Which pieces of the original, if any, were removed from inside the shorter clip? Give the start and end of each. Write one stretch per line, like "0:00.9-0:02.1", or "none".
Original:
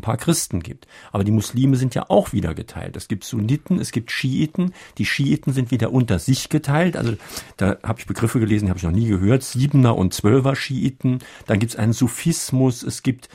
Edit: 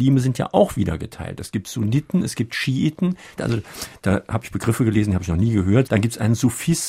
0:04.9-0:06.9
0:09.4-0:11.4